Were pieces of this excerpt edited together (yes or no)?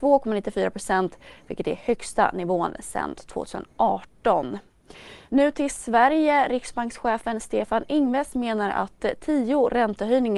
no